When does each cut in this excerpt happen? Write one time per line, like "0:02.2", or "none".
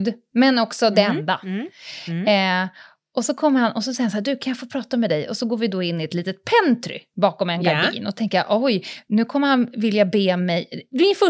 none